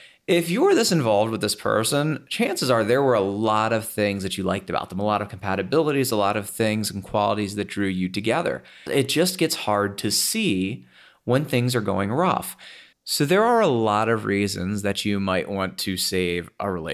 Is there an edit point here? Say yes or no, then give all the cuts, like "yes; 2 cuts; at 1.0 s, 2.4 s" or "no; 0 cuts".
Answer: yes; 2 cuts; at 8.9 s, 12.9 s